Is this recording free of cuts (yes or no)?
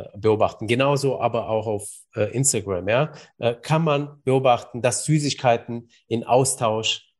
yes